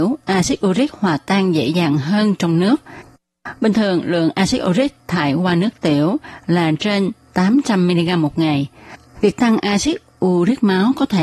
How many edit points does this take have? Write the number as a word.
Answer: two